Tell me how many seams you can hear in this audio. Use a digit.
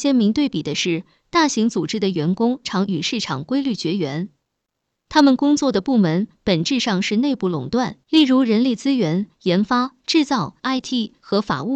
3